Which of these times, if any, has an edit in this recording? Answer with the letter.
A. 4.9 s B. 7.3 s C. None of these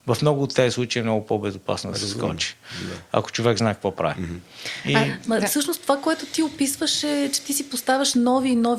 C